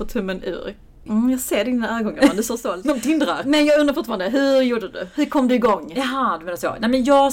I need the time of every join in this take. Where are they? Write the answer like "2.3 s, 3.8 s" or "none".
1.1 s